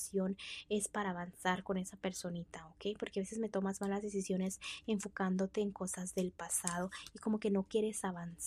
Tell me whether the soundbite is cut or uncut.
uncut